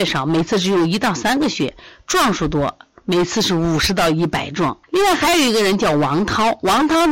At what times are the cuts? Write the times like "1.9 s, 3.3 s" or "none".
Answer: 4.8 s